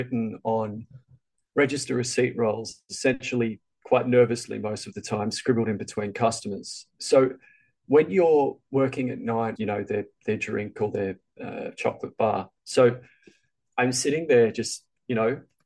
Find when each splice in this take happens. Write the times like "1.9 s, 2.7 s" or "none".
9.6 s